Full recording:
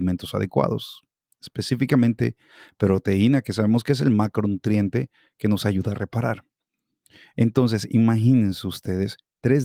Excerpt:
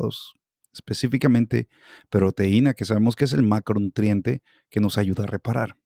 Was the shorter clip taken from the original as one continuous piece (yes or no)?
yes